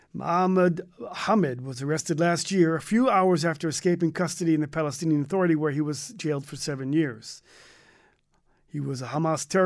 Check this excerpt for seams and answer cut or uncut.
uncut